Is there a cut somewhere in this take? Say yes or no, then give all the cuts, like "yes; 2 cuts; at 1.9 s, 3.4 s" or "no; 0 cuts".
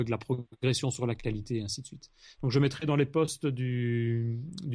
no; 0 cuts